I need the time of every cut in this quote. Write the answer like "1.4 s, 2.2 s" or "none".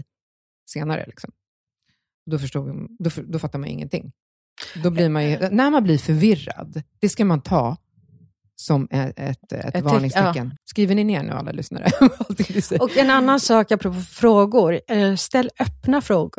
10.6 s